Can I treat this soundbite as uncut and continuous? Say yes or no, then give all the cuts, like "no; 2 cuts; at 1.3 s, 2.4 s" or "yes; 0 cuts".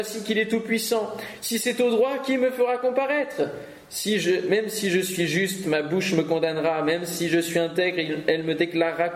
yes; 0 cuts